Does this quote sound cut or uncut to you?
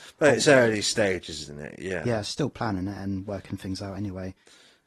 uncut